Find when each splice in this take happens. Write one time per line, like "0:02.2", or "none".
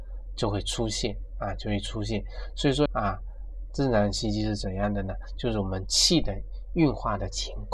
0:02.9